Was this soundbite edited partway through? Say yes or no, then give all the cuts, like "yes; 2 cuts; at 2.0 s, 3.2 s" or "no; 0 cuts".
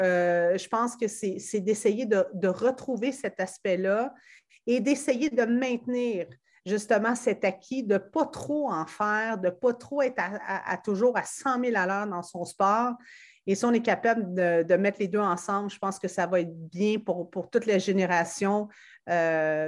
no; 0 cuts